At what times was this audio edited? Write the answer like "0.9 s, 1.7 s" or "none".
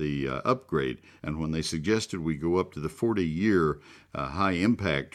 1.2 s